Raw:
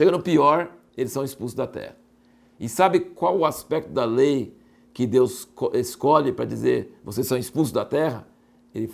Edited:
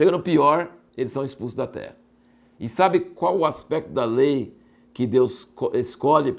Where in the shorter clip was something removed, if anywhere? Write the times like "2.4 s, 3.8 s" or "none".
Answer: none